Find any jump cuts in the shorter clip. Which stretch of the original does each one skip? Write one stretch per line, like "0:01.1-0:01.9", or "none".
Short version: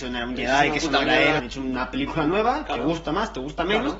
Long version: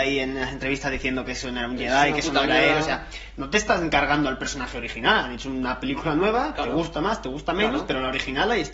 0:02.8-0:05.3